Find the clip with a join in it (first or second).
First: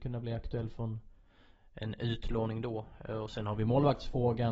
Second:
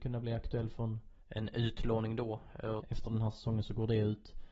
second